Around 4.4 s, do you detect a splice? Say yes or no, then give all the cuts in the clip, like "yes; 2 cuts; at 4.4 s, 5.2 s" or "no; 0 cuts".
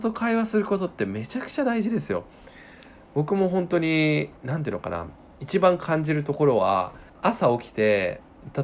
yes; 2 cuts; at 4.4 s, 7.1 s